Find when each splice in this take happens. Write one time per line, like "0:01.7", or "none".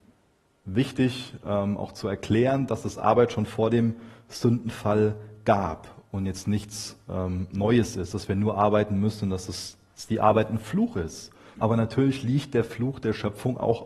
0:11.5